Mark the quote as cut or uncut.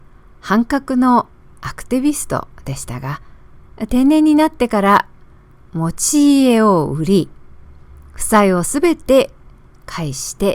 uncut